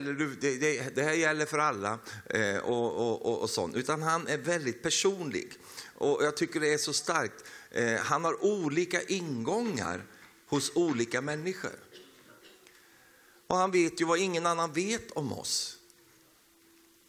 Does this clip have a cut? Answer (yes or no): no